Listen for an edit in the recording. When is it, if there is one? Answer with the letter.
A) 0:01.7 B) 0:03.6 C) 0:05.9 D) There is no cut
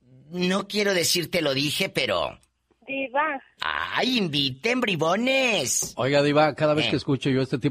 B